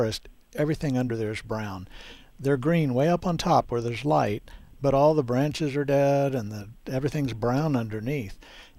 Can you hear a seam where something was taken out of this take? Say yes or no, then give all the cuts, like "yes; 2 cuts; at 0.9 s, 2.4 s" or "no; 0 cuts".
no; 0 cuts